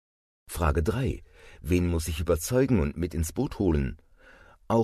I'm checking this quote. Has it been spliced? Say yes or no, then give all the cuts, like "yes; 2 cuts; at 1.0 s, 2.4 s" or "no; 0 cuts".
no; 0 cuts